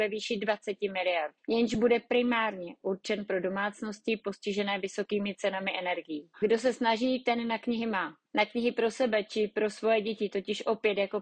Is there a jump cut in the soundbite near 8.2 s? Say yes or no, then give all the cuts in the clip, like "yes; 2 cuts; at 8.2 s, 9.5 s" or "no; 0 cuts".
yes; 2 cuts; at 6.3 s, 8.2 s